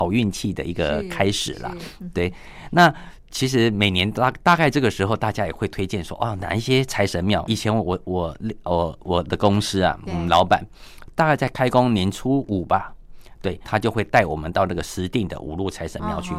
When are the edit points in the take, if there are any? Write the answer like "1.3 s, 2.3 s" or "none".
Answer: 7.5 s, 13.6 s